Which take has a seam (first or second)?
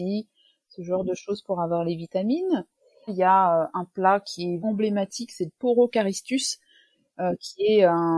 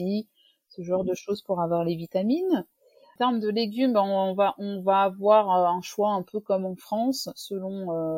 first